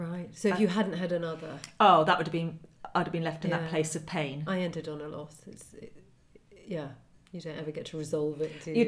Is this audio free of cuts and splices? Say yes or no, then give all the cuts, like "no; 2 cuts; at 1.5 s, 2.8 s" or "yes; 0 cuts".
yes; 0 cuts